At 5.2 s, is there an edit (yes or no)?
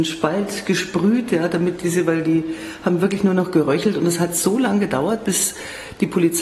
no